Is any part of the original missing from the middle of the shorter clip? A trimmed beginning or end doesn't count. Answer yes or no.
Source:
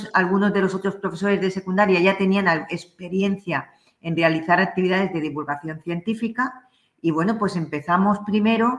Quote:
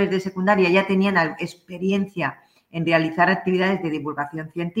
no